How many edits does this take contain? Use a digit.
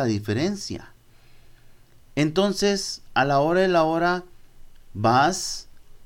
1